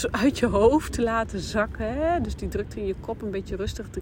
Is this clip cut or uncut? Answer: uncut